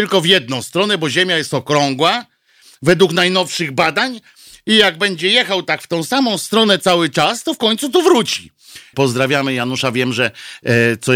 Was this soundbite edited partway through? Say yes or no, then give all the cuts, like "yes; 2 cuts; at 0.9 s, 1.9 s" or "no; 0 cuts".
yes; 1 cut; at 8.9 s